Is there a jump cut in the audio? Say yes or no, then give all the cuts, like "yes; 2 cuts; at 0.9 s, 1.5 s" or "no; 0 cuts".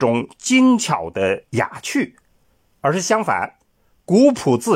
no; 0 cuts